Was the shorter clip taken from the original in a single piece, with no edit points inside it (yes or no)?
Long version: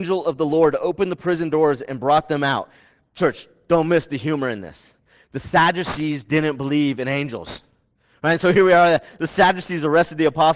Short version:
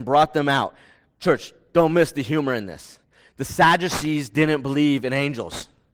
yes